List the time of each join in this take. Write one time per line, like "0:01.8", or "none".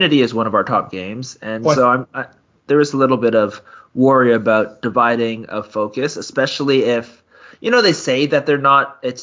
none